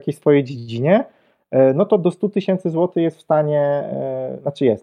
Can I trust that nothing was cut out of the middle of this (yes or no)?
yes